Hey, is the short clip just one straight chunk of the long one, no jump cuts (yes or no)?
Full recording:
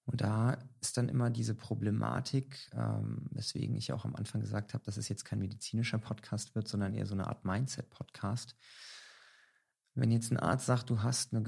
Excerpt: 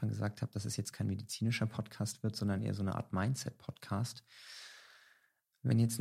yes